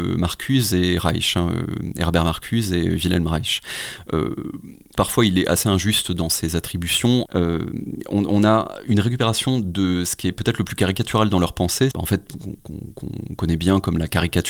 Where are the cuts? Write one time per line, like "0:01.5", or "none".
0:05.0
0:07.3
0:11.9